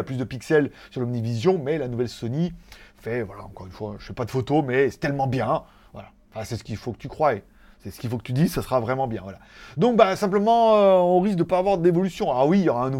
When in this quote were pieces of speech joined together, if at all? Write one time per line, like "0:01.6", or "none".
none